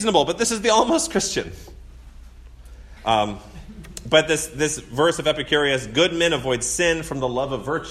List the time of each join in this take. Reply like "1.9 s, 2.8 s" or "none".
3.0 s